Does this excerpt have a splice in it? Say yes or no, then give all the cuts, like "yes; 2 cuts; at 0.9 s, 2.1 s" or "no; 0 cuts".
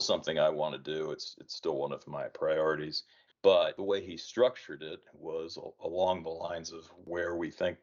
yes; 1 cut; at 3.3 s